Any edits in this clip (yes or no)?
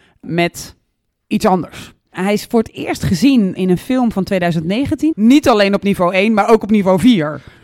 yes